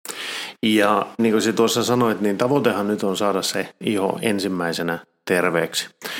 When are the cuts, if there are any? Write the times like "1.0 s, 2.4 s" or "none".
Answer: 1.2 s